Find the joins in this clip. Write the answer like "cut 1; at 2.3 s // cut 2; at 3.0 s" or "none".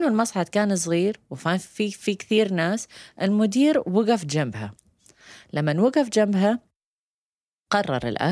none